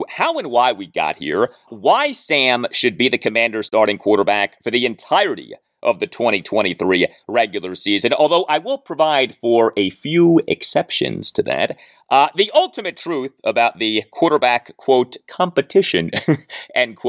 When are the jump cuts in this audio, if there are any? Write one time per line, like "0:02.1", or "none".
0:01.7